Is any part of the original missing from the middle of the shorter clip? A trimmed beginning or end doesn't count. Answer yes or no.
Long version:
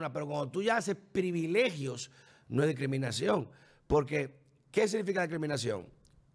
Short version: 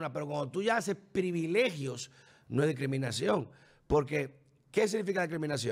no